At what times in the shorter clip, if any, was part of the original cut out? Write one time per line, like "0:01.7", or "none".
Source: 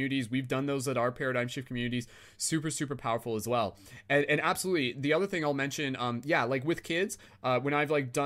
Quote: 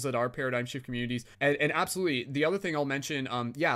0:01.3